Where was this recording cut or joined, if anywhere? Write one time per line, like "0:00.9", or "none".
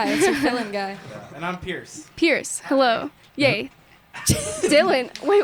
0:03.7